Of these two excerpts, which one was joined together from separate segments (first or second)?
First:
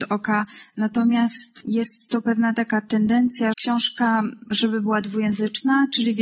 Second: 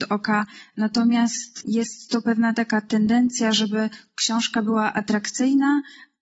first